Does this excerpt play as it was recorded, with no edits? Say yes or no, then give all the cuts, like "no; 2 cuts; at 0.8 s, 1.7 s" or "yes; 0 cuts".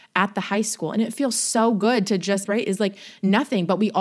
no; 1 cut; at 2.5 s